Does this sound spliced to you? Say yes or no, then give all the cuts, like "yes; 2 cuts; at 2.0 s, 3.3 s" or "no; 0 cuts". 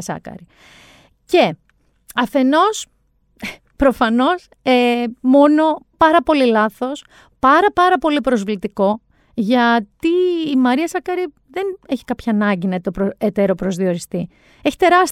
yes; 1 cut; at 5.9 s